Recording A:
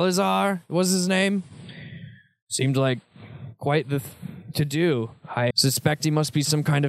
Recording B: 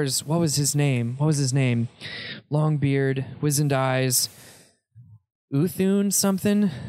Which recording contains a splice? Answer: A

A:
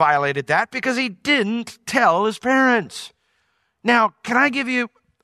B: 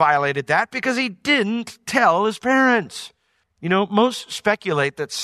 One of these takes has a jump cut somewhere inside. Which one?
B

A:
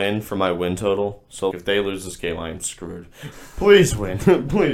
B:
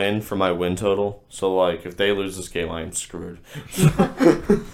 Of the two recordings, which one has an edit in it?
A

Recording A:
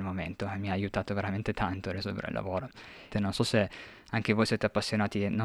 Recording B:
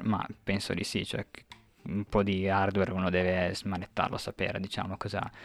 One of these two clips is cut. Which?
A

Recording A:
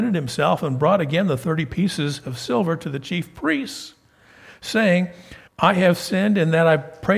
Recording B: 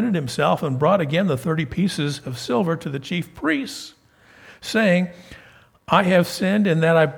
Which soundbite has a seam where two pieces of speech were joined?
A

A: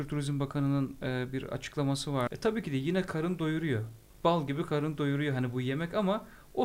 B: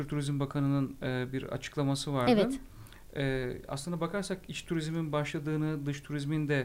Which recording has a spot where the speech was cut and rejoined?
A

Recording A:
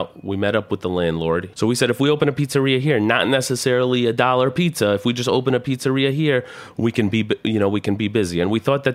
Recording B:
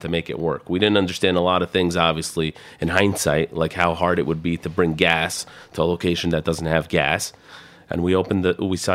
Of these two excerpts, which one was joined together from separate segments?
A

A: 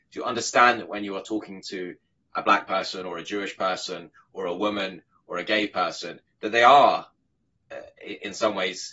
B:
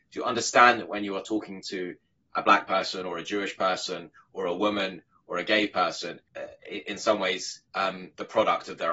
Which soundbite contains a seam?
B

